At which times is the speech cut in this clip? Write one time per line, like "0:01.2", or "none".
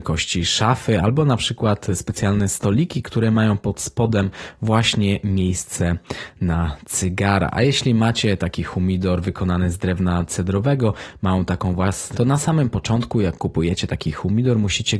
0:12.1